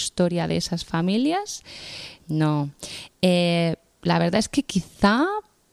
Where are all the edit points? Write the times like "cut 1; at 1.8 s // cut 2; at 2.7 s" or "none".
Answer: cut 1; at 2.2 s

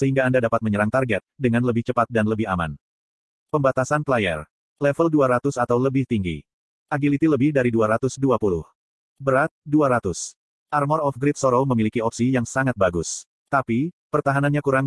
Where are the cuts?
none

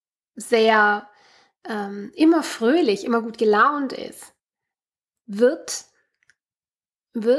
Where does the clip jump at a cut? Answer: none

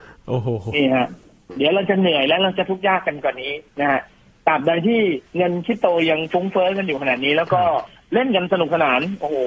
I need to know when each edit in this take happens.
cut 1; at 3.7 s

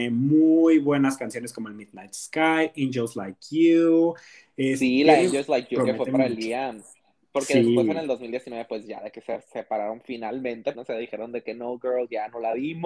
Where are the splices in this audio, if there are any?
cut 1; at 10.7 s

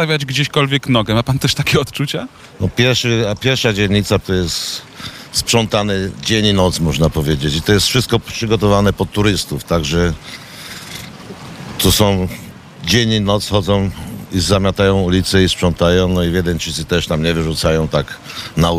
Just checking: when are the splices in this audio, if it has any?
cut 1; at 4.2 s

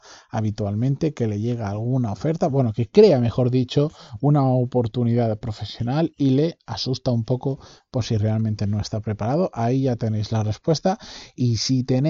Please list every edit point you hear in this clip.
none

